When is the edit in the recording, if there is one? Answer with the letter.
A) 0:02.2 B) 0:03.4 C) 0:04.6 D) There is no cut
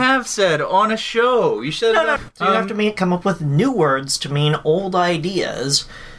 A